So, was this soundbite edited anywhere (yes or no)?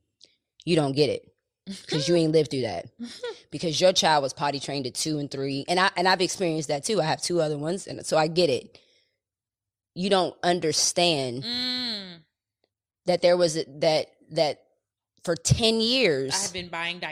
no